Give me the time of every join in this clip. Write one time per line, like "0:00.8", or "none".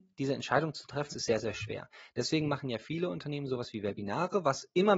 0:01.1